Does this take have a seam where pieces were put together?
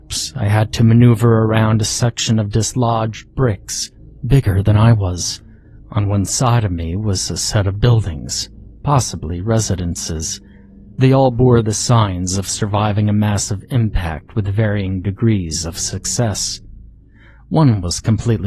no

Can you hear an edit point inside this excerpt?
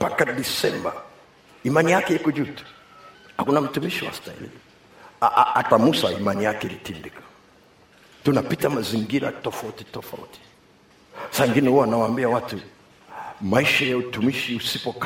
no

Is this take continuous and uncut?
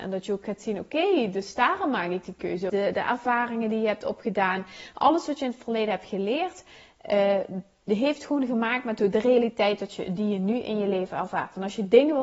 no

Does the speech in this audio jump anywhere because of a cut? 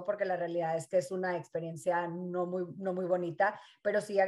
no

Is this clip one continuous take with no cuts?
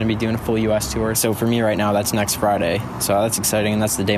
no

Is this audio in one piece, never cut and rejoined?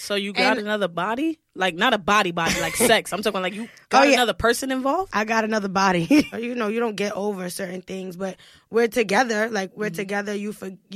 no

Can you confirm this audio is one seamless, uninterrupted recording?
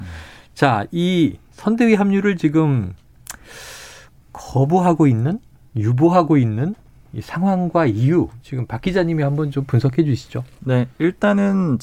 yes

